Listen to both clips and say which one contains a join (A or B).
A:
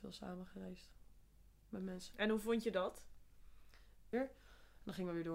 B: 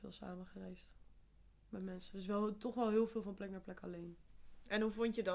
A